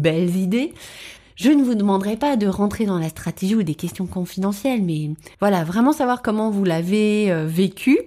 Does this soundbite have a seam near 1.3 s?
no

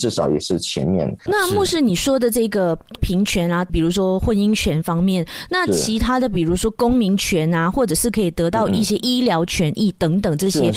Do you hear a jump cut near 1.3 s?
yes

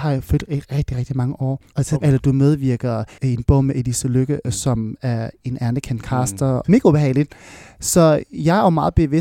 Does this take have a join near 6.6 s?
yes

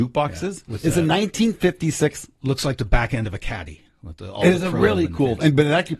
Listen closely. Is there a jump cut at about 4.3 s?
no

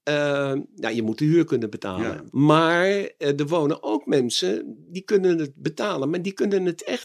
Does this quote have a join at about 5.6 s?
no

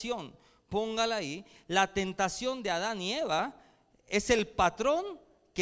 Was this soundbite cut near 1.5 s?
no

